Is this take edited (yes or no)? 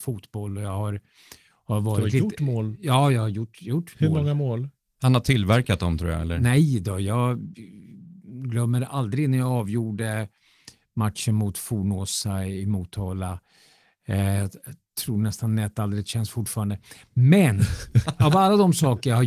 no